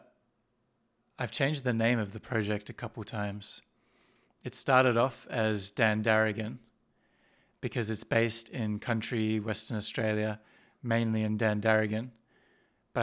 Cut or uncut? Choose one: uncut